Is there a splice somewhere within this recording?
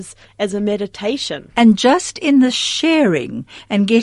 yes; 1 cut; at 1.5 s

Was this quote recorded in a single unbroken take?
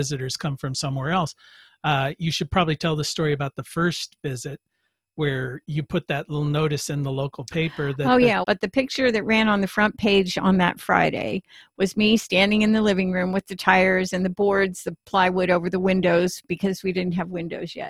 no; 1 cut; at 8.4 s

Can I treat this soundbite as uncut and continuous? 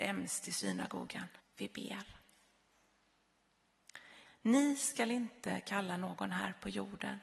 no; 2 cuts; at 1.4 s, 4.2 s

